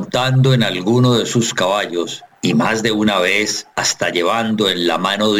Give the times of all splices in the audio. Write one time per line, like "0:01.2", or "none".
0:02.4
0:03.7